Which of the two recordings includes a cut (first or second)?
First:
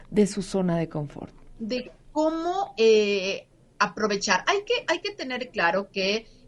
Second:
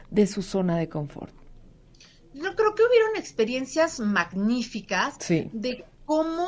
first